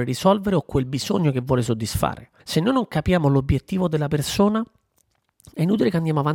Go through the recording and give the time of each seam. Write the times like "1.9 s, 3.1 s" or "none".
2.4 s